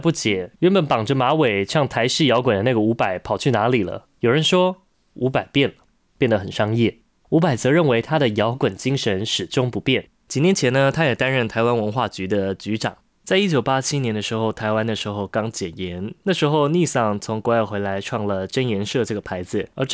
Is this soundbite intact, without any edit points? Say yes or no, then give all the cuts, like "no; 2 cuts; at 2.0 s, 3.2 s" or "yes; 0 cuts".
no; 1 cut; at 10.2 s